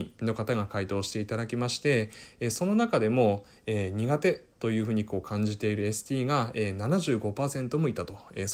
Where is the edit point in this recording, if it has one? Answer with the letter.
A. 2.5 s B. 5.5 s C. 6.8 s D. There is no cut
D